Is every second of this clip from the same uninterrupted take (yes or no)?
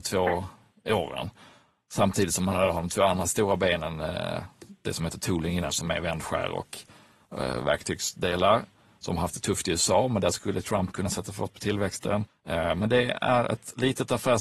no